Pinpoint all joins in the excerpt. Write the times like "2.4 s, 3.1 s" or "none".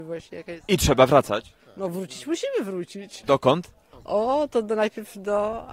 none